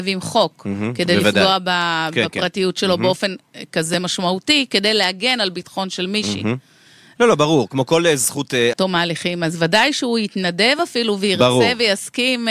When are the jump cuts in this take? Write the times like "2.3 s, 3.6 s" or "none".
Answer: 7.2 s, 8.7 s